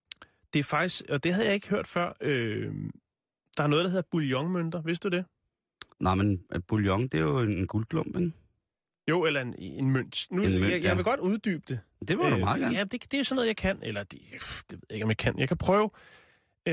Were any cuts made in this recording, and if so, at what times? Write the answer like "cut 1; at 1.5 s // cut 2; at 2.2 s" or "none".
cut 1; at 5.9 s